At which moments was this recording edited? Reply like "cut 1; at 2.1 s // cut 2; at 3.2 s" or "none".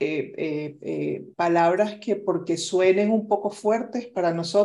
cut 1; at 1.3 s